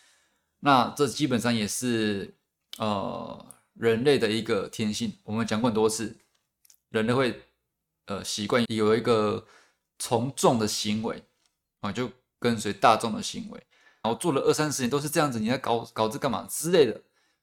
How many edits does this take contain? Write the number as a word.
two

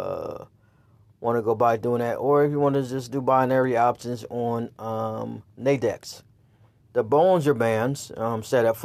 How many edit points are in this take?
one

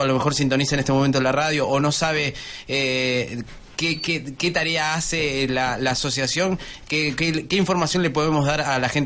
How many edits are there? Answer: zero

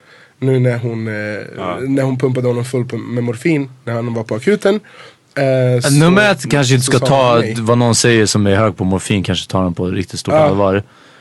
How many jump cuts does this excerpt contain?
zero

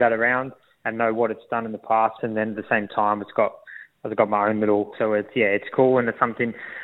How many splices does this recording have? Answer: two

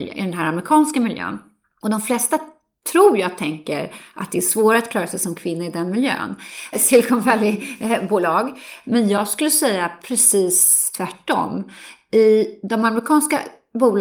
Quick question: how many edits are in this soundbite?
two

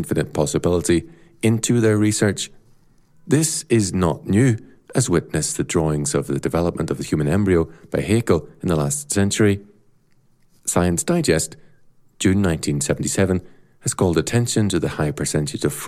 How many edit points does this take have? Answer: one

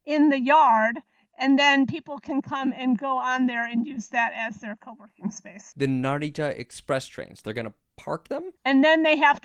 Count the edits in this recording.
one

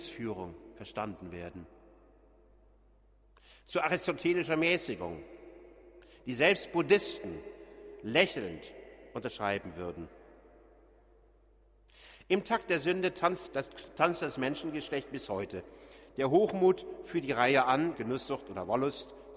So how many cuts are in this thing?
two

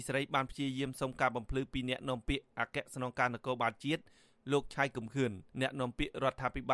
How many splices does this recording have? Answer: one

